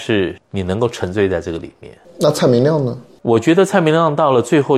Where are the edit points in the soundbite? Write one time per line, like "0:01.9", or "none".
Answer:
0:03.2

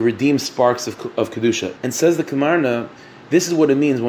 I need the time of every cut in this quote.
0:01.8

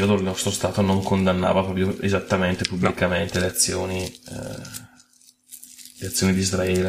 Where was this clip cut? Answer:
none

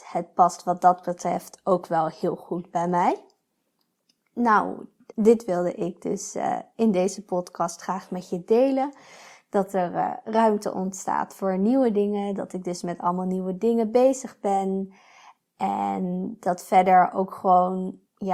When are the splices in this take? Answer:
0:05.1

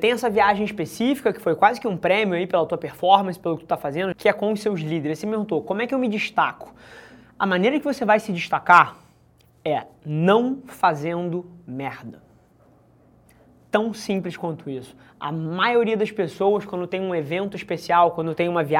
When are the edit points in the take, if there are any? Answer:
0:04.1

